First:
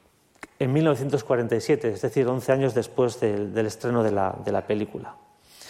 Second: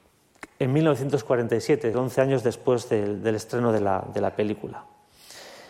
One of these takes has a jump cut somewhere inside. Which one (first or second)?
second